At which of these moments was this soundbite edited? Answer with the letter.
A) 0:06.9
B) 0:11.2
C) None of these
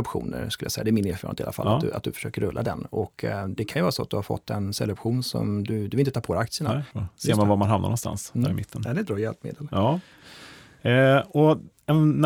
A